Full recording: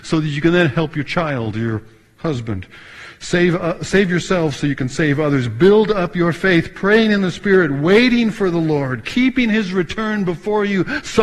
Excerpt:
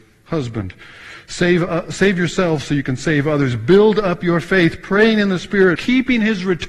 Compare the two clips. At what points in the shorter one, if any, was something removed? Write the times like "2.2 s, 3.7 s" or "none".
5.8 s